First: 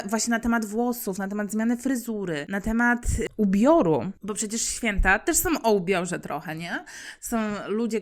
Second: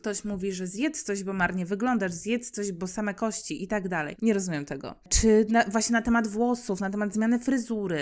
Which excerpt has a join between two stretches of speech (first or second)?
second